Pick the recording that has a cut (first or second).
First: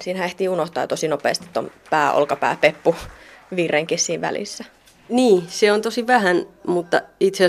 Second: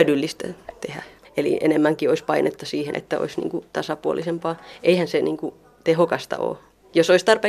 second